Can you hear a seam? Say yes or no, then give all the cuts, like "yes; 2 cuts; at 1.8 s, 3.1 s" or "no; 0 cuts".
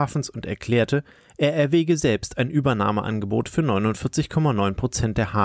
no; 0 cuts